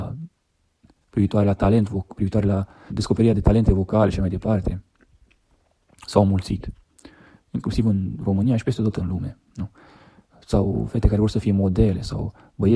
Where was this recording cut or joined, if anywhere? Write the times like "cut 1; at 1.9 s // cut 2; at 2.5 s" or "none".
cut 1; at 2.9 s